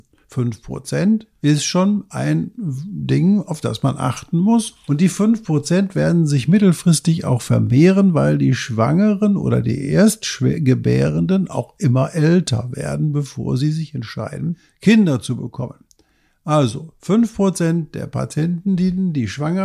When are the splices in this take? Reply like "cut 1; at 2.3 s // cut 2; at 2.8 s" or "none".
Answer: none